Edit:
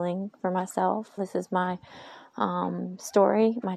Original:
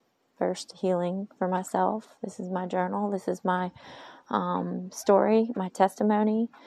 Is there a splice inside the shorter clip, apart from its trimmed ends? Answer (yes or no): yes